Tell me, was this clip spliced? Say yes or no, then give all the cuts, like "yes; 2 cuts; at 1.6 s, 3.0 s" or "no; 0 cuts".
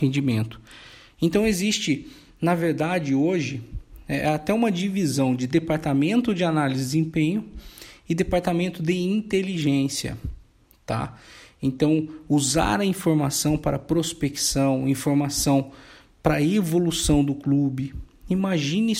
no; 0 cuts